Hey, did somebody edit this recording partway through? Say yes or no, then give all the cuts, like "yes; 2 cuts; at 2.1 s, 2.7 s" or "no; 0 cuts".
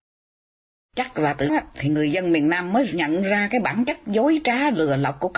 yes; 1 cut; at 1.5 s